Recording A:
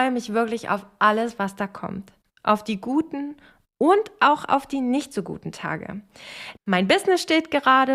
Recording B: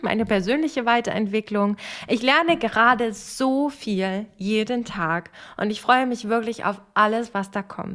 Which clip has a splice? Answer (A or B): A